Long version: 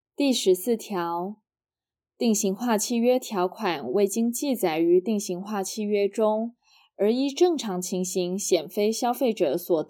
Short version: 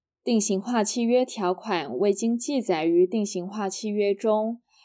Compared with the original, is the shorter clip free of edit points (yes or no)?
yes